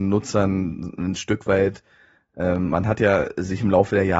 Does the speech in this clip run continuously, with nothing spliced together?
yes; 0 cuts

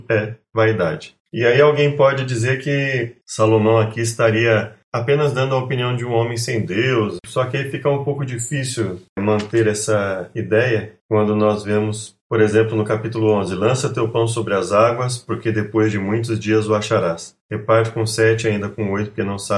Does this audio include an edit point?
no; 0 cuts

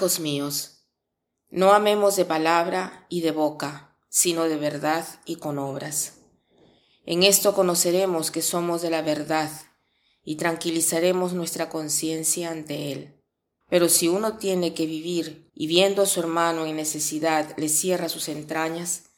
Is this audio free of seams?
no; 2 cuts; at 13.6 s, 15.5 s

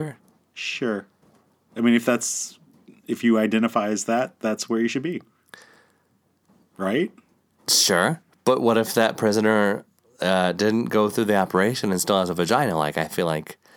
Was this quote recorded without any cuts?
yes; 0 cuts

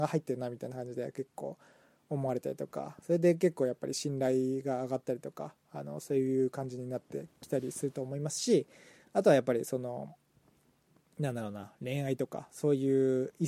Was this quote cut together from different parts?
no; 0 cuts

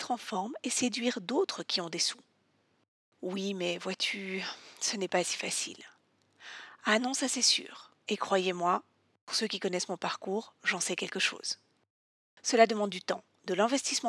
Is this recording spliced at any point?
no; 0 cuts

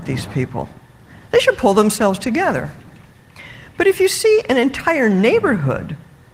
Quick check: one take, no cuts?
yes; 0 cuts

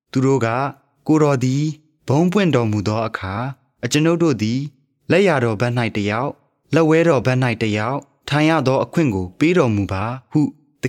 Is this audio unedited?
yes; 0 cuts

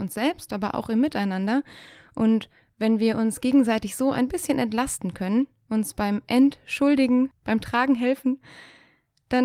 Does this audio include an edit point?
no; 0 cuts

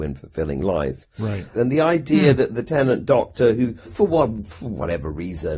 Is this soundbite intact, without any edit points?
no; 2 cuts; at 1.5 s, 3.8 s

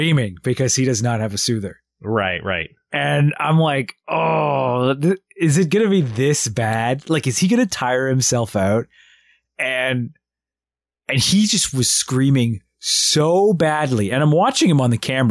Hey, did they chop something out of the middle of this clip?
no; 0 cuts

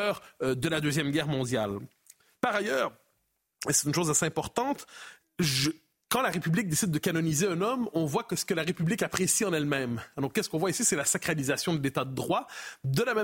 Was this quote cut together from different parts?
yes; 1 cut; at 5.2 s

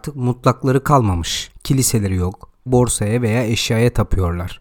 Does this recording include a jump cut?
yes; 1 cut; at 2.7 s

